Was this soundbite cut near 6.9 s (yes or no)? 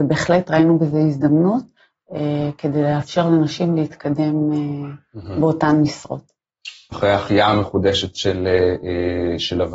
yes